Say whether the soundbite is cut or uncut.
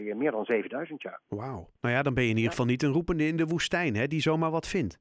cut